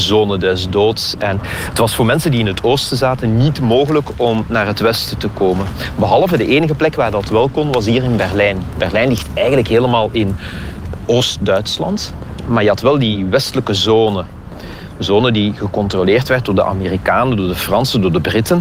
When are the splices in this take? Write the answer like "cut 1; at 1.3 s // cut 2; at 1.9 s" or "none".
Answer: none